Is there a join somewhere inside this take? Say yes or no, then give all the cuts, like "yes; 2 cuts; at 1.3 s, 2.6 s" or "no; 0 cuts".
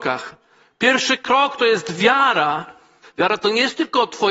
yes; 1 cut; at 3.0 s